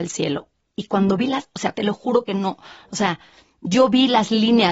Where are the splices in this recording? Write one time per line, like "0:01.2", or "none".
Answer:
0:01.7